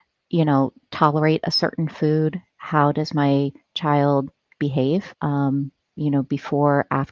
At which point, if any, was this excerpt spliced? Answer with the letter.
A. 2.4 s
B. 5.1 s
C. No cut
B